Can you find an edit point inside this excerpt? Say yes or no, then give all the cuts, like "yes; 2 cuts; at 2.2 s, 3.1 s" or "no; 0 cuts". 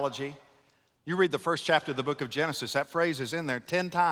yes; 1 cut; at 1.0 s